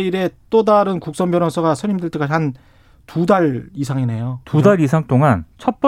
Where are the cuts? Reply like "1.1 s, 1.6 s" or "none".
none